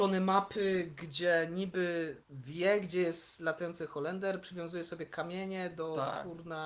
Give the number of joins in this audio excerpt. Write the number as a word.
one